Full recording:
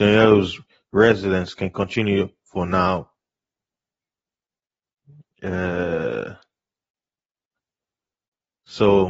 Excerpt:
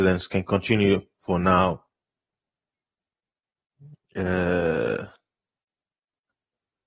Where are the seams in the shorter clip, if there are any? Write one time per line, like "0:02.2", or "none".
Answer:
none